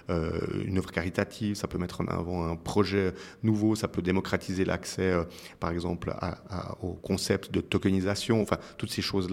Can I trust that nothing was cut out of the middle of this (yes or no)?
yes